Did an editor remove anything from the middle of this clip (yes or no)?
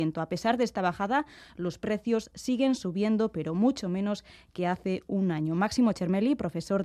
no